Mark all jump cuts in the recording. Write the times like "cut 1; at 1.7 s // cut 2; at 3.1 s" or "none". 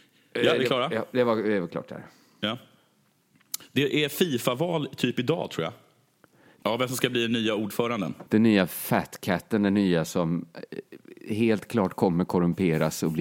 cut 1; at 6.6 s // cut 2; at 8.3 s